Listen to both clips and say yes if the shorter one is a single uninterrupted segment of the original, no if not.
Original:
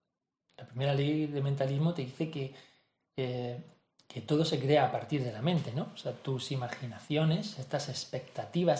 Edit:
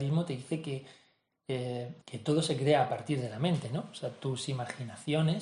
no